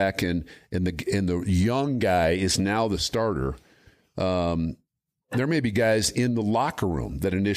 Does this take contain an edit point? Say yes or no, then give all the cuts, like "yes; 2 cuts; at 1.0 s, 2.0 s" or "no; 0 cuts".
no; 0 cuts